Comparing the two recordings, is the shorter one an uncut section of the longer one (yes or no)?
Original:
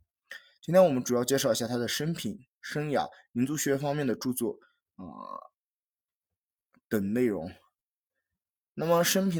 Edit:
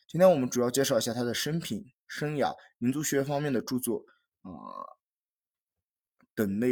yes